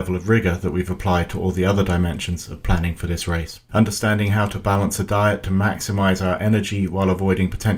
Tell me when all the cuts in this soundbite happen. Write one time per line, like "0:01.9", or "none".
0:03.7

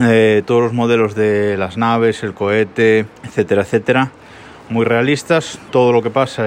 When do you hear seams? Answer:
0:03.2
0:04.7

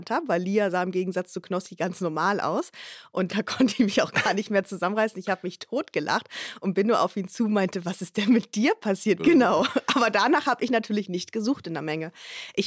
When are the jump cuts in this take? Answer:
0:03.3
0:09.2

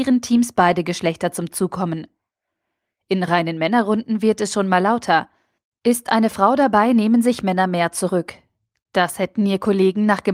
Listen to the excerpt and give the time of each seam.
none

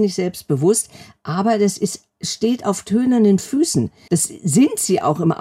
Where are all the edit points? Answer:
0:04.1

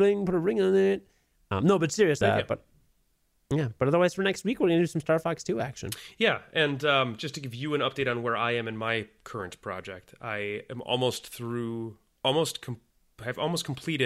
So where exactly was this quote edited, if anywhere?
0:02.2

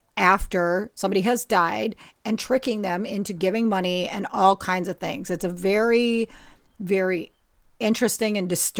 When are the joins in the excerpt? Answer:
none

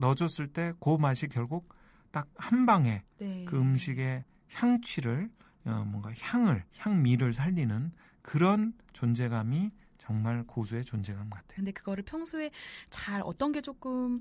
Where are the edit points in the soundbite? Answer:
0:06.7
0:11.6

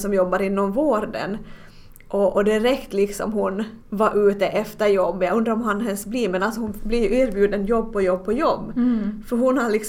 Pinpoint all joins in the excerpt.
0:03.8

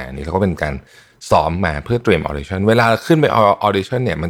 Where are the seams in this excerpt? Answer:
none

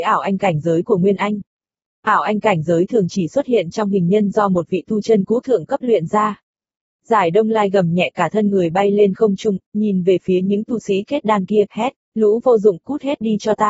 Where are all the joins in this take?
0:09.7
0:12.0

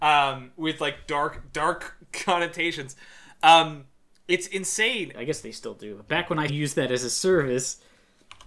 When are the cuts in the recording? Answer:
0:05.1
0:06.5

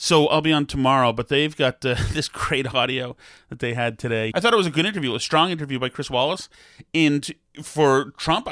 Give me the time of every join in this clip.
0:04.3

